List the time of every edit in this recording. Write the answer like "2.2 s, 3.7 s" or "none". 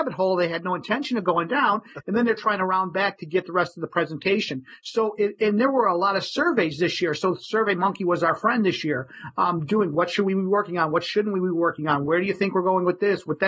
none